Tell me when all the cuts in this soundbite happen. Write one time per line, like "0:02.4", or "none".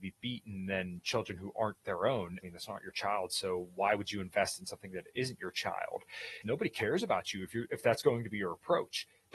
0:02.4
0:06.4